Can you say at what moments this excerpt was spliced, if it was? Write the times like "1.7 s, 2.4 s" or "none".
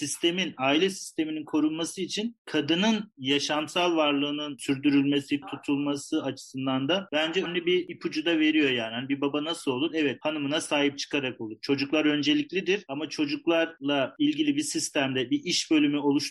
5.4 s, 7.5 s